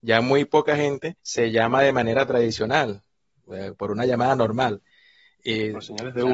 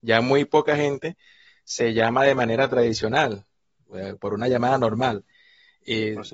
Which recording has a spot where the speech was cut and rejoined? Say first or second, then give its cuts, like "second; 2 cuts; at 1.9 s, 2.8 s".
first; 1 cut; at 1.2 s